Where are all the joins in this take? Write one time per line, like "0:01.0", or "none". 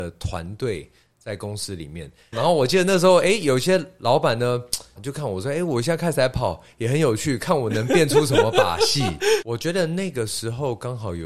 0:02.3
0:05.0
0:09.4